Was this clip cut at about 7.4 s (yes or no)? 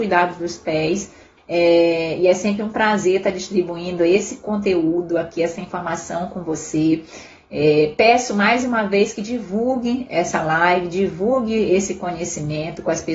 no